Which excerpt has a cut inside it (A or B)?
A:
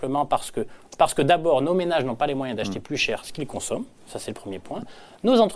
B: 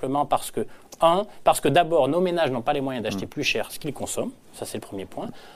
A